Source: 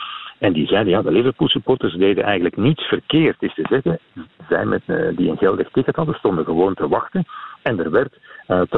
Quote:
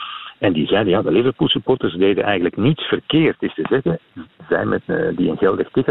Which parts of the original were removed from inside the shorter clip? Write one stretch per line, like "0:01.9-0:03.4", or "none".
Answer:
none